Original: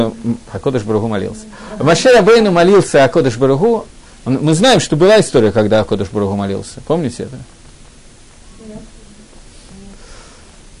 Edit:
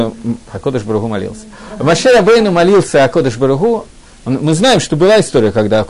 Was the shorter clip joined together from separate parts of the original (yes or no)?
no